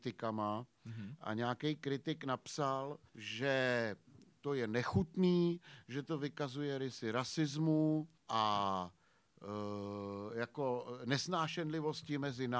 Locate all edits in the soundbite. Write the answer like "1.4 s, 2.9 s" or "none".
3.1 s, 8.2 s